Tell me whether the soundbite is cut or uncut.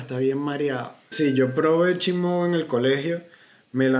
cut